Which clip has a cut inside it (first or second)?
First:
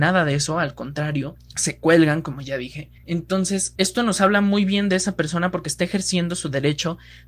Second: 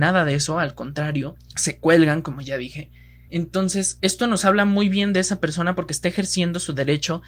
first